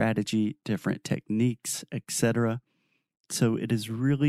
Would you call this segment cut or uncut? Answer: uncut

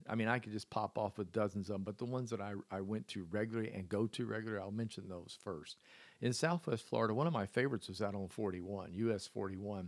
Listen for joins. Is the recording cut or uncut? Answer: uncut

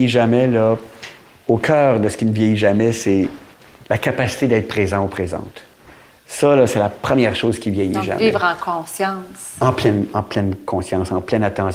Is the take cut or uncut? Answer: uncut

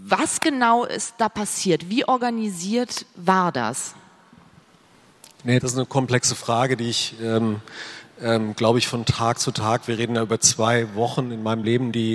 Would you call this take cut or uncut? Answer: cut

